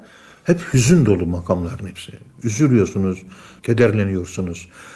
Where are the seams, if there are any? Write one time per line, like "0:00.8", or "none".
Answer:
none